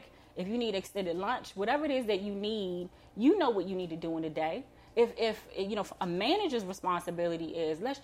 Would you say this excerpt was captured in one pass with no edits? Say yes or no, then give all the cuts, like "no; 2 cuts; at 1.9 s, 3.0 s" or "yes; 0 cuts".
yes; 0 cuts